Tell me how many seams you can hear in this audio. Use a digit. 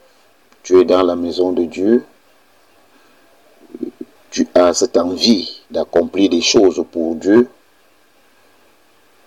2